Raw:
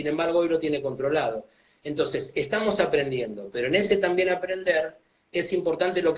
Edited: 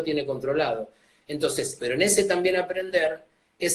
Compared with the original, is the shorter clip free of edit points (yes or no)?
no